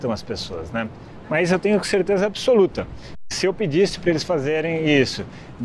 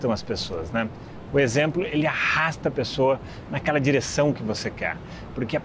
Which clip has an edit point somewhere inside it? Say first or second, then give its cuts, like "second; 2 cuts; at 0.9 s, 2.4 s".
first; 1 cut; at 1.2 s